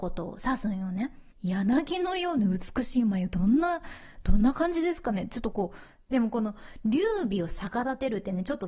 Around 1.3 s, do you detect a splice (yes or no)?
yes